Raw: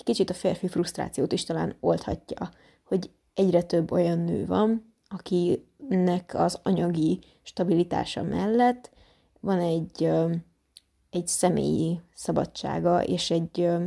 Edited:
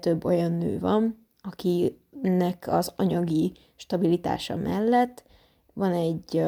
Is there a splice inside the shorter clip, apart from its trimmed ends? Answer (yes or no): no